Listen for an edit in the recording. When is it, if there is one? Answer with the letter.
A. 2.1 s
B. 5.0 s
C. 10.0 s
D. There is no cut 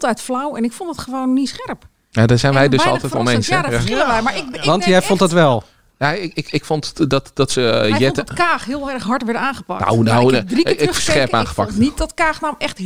D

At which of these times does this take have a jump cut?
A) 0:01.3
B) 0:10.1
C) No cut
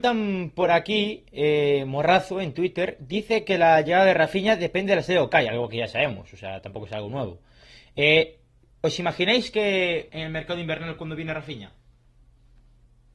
B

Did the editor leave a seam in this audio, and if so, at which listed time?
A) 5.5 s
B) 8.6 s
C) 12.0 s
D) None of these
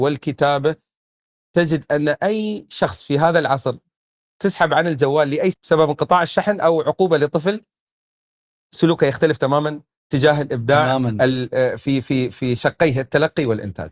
A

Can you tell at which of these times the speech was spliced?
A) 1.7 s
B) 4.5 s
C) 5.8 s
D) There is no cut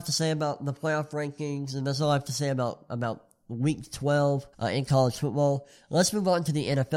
B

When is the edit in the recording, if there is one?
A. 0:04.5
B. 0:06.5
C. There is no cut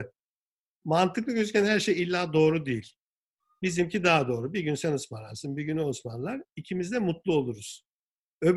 C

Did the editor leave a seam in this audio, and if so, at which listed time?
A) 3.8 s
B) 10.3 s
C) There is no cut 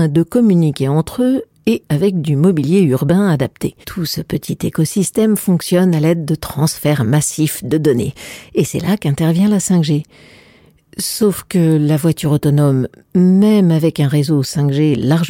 A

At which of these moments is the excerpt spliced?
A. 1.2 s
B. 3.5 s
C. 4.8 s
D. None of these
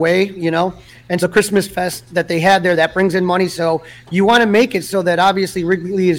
A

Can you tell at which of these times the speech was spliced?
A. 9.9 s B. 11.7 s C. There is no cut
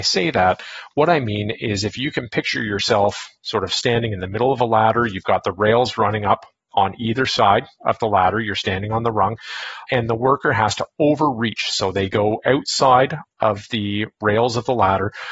A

